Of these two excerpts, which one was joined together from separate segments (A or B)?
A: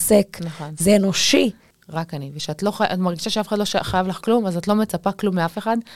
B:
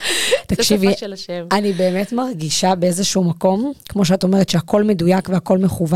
A